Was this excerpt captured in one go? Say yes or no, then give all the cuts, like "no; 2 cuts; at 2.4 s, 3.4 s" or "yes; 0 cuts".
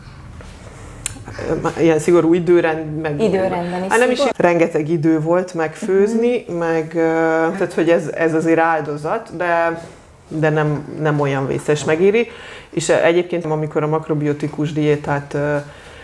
no; 3 cuts; at 4.3 s, 7.5 s, 13.4 s